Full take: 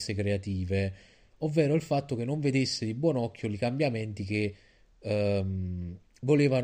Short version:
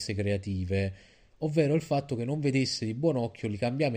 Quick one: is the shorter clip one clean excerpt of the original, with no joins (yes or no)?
yes